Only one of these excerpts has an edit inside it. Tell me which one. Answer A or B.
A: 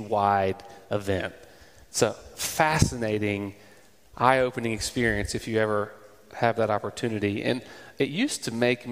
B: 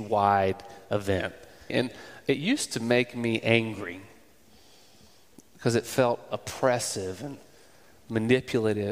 B